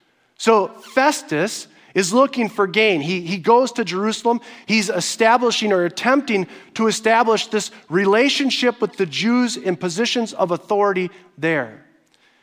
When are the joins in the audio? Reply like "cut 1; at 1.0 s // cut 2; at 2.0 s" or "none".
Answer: none